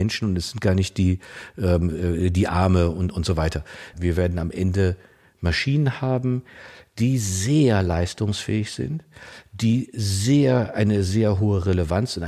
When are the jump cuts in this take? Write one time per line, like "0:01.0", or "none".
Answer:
0:03.9